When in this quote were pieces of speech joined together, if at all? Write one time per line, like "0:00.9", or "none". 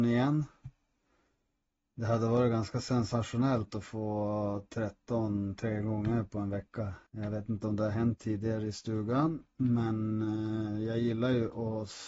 0:07.1